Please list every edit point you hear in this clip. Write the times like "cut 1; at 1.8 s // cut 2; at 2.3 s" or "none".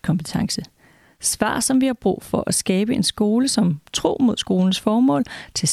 none